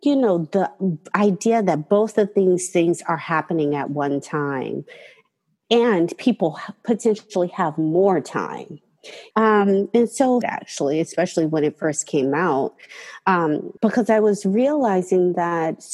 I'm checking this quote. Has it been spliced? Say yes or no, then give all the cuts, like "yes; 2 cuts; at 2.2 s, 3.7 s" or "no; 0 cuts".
yes; 3 cuts; at 9.3 s, 10.4 s, 13.8 s